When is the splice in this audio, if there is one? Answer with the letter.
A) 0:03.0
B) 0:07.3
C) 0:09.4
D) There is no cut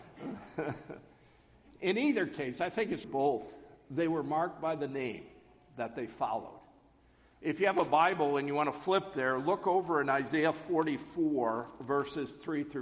A